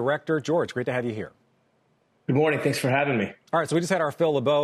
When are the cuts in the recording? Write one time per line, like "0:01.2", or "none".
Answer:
none